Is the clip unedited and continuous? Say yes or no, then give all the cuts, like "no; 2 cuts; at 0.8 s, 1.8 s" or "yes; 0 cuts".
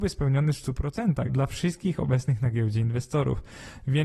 no; 1 cut; at 1.3 s